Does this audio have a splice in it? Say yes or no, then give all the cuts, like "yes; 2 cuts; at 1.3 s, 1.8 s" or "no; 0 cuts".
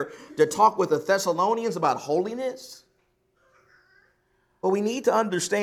yes; 1 cut; at 4.6 s